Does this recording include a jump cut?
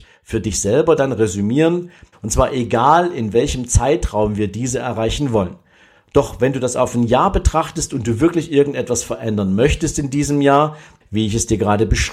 yes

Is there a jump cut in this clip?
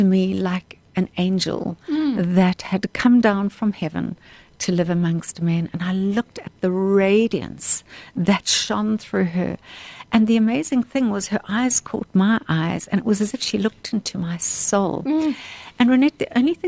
yes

